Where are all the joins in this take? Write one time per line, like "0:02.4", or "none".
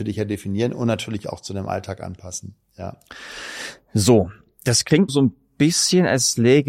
0:05.1